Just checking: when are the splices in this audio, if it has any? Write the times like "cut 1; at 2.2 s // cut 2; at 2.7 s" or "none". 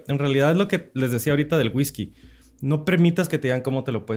none